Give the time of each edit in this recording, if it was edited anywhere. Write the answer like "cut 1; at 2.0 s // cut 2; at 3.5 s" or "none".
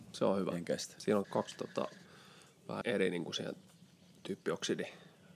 cut 1; at 1.2 s // cut 2; at 2.8 s